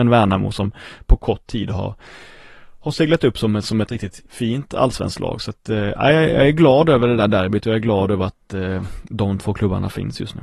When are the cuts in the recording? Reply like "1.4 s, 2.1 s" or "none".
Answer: 4.3 s